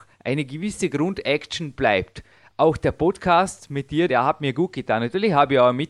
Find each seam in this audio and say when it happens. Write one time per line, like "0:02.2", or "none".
0:04.1